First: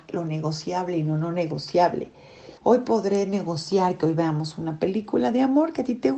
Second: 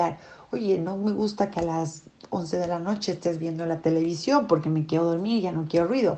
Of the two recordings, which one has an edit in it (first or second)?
first